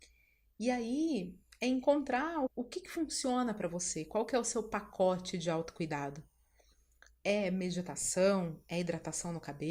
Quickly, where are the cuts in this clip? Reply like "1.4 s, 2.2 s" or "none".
2.5 s